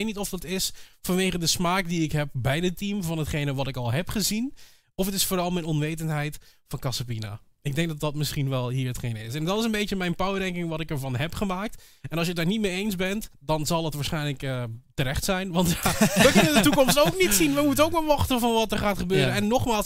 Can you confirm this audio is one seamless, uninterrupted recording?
yes; 0 cuts

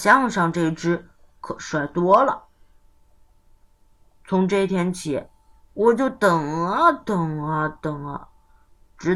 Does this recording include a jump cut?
no; 0 cuts

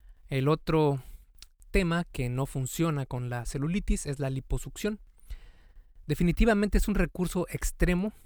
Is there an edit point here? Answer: no; 0 cuts

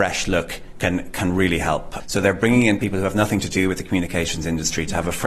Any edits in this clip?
yes; 1 cut; at 2.0 s

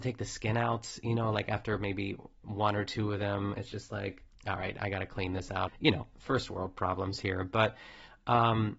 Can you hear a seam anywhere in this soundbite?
yes; 2 cuts; at 4.3 s, 5.7 s

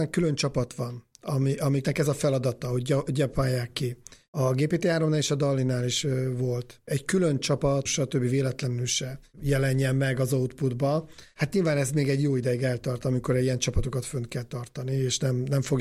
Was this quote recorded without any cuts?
no; 1 cut; at 7.9 s

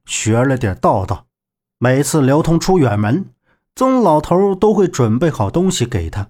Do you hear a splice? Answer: no; 0 cuts

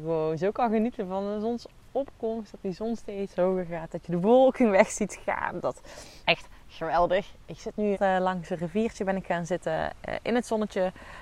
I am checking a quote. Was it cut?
yes; 2 cuts; at 6.2 s, 7.9 s

